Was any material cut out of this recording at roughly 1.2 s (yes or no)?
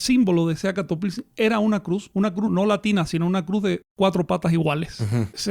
no